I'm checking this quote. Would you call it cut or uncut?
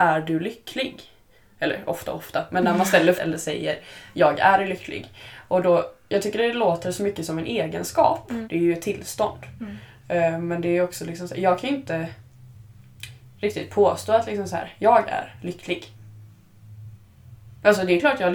cut